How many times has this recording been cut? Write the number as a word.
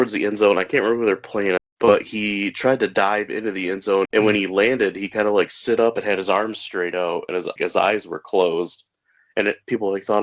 three